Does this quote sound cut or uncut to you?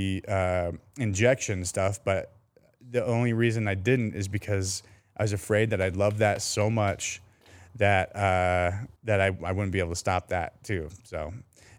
cut